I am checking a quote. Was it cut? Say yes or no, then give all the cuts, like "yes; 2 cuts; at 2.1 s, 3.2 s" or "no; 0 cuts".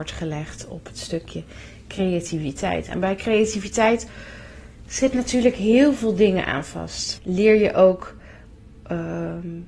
yes; 1 cut; at 7.2 s